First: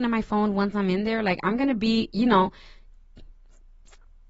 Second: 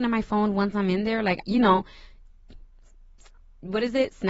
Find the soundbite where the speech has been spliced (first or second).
second